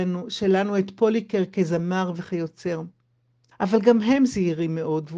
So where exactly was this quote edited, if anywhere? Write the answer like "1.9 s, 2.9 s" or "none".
3.5 s